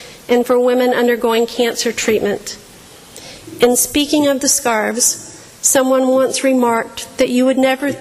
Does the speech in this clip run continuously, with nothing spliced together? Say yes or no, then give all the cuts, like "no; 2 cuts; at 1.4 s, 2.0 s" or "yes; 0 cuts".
yes; 0 cuts